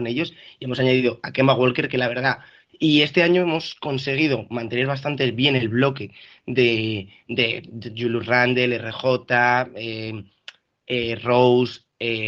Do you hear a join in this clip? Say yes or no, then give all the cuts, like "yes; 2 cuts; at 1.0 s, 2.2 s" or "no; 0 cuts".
yes; 1 cut; at 2.7 s